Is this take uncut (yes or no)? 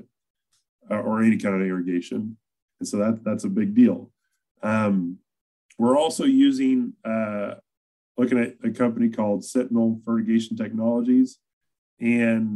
no